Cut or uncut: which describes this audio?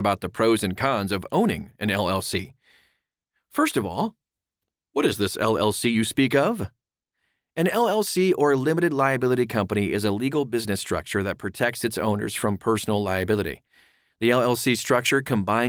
uncut